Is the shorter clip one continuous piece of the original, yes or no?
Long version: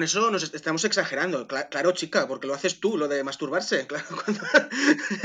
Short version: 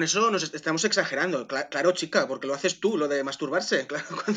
yes